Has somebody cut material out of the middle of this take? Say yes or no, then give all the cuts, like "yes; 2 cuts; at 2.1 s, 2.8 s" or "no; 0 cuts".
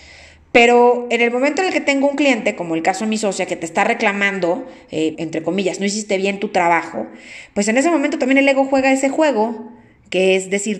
yes; 1 cut; at 5.1 s